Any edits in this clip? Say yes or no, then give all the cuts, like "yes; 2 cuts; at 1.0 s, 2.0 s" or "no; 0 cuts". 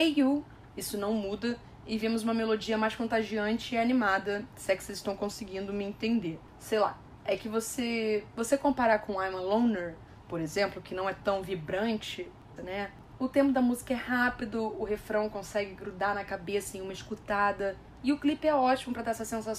yes; 1 cut; at 12.6 s